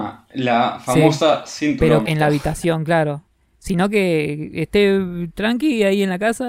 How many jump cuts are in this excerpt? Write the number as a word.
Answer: one